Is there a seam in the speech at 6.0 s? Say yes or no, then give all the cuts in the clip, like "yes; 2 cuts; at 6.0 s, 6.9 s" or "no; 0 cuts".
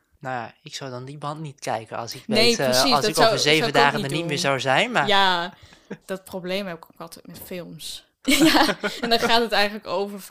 yes; 2 cuts; at 6.0 s, 8.2 s